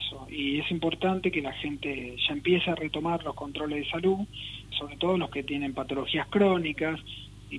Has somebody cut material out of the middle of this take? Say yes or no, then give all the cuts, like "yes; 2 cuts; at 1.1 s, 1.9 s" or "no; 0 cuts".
yes; 1 cut; at 4.7 s